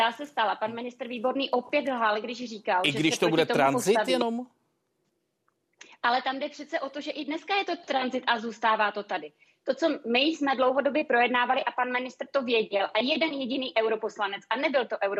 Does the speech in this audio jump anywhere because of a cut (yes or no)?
no